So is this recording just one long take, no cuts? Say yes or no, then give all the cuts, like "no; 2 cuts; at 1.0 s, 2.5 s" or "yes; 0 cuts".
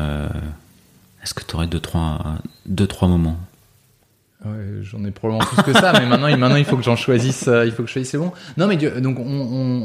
yes; 0 cuts